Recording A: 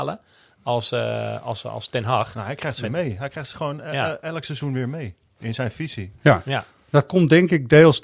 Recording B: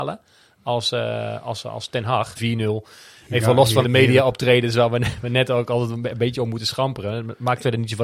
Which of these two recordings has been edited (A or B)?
B